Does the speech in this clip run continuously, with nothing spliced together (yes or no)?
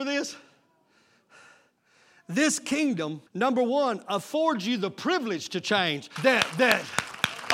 no